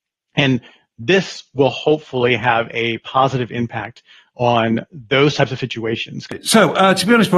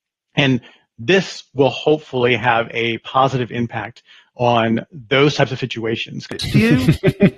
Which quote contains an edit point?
second; 1 cut; at 6.4 s

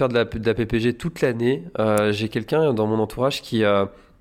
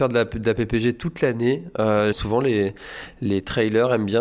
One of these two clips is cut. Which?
second; 1 cut; at 2.1 s

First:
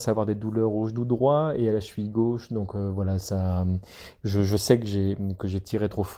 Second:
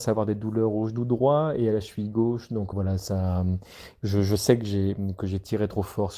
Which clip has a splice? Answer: second; 1 cut; at 2.7 s

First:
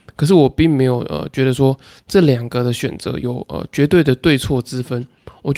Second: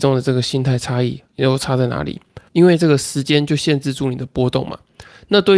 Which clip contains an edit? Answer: second; 1 cut; at 2.5 s

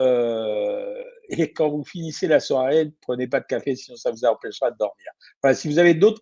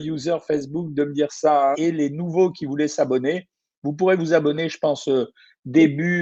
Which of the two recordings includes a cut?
second; 1 cut; at 1.7 s

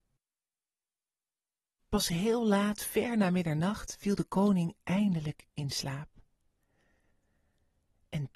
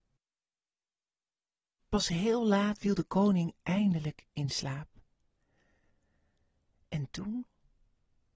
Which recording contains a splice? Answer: second; 1 cut; at 2.8 s

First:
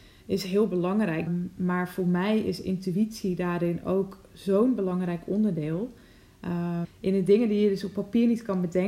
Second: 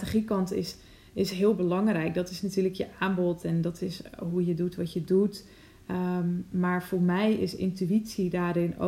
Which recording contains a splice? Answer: first; 2 cuts; at 1.3 s, 6.8 s

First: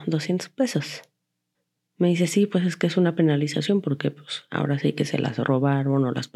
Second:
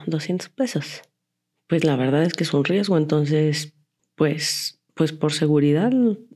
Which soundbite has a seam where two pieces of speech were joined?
second; 2 cuts; at 1.5 s, 4.9 s

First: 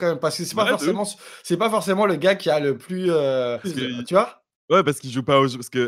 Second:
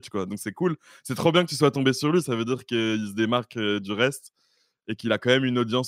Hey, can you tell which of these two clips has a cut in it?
first; 1 cut; at 3.6 s

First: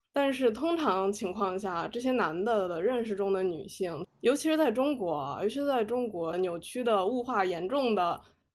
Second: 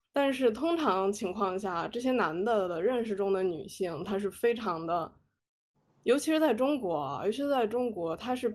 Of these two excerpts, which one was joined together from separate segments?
first; 2 cuts; at 4.0 s, 6.3 s

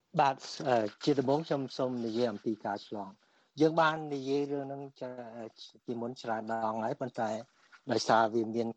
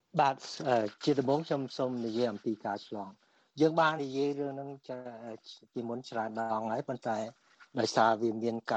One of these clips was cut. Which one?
second; 1 cut; at 4.0 s

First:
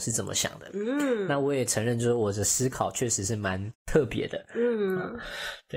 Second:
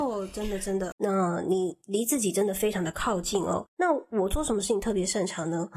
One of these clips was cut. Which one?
second; 1 cut; at 0.9 s

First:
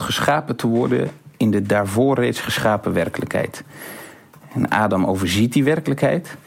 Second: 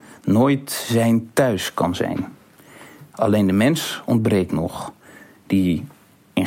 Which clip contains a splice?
second; 1 cut; at 3.1 s

